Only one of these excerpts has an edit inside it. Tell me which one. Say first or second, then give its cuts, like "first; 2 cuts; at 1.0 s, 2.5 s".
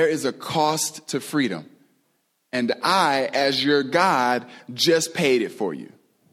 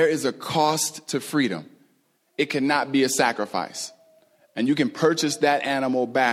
second; 1 cut; at 2.2 s